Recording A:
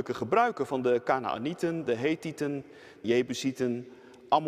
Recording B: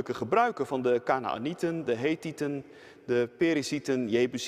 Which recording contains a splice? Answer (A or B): A